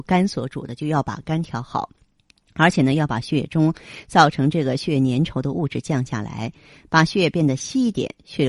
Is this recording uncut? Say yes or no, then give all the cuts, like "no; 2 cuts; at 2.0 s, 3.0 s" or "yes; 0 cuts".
yes; 0 cuts